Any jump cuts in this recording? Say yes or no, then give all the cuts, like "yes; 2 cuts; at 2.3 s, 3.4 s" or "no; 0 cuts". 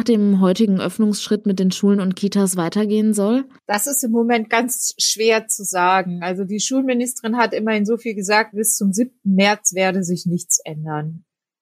no; 0 cuts